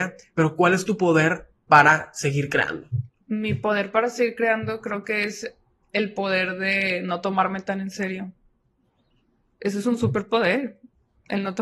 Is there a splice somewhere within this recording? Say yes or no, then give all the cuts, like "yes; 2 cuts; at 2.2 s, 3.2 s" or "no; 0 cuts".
no; 0 cuts